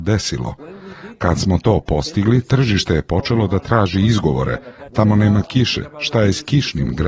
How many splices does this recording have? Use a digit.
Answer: 1